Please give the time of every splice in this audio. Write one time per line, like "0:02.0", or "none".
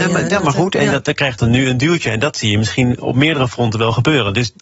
none